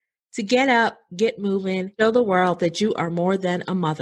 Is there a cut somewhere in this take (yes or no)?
no